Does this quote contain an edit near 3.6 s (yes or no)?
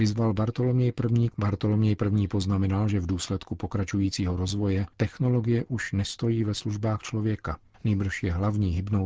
no